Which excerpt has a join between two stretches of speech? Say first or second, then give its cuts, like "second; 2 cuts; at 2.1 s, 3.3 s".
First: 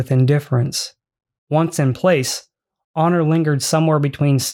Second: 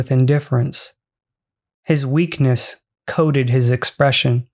first; 1 cut; at 1.3 s